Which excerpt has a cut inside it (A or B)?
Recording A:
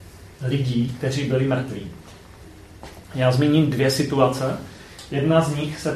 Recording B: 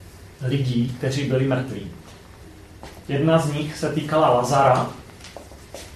B